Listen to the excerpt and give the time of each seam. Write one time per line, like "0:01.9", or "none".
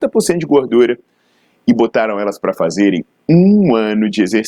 none